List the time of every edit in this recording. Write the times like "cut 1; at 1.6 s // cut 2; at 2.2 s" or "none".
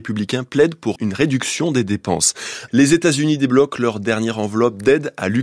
cut 1; at 1.0 s // cut 2; at 2.7 s